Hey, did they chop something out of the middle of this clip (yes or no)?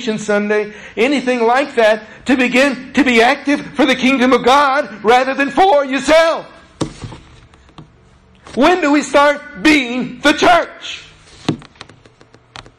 no